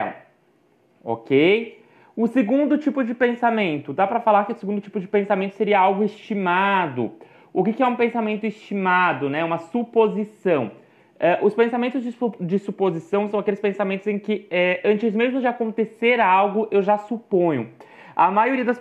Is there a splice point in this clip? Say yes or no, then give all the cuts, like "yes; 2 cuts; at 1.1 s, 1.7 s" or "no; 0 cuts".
no; 0 cuts